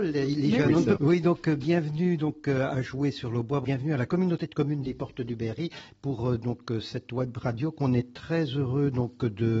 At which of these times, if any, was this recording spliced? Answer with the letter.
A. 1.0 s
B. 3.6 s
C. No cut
A